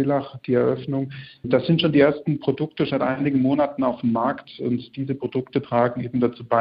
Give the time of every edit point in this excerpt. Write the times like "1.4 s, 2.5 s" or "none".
2.9 s